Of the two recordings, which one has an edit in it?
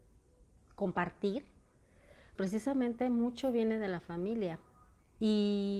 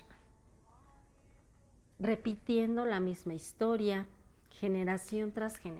first; 1 cut; at 2.4 s

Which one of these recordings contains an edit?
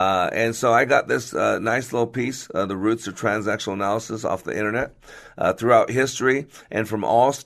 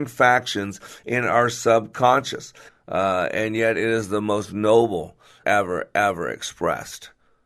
second; 2 cuts; at 2.7 s, 5.4 s

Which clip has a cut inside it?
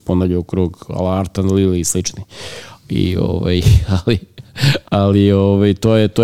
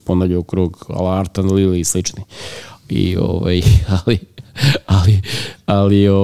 first; 1 cut; at 4.8 s

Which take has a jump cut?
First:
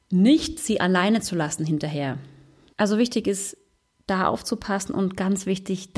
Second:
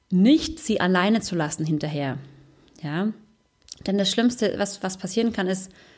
first; 1 cut; at 2.7 s

